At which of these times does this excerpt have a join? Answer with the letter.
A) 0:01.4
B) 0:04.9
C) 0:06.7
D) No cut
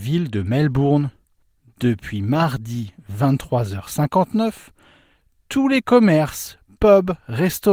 D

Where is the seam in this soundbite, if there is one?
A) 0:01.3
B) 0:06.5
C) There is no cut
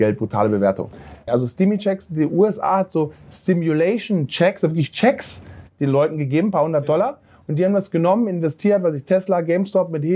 A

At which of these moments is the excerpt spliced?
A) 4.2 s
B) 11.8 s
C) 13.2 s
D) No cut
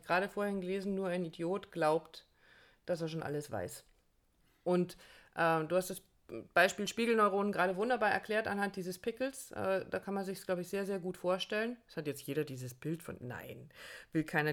D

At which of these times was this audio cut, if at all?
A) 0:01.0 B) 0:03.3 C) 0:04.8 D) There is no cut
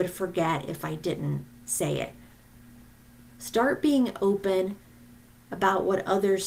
B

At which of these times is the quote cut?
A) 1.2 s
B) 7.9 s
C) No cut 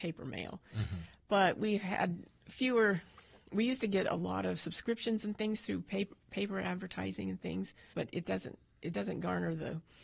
B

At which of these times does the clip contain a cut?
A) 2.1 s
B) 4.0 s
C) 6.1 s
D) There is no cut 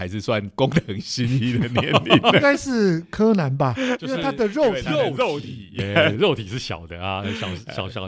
C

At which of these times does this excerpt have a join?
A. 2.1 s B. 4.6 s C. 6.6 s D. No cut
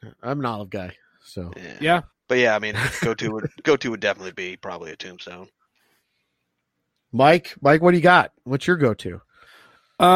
A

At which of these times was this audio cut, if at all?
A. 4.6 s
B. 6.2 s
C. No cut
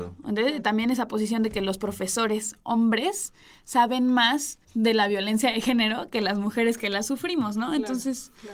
A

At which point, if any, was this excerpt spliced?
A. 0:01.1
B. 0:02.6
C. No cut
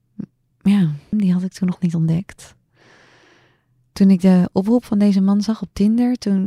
A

